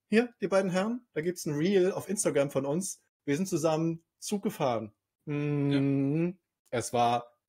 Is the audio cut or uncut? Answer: uncut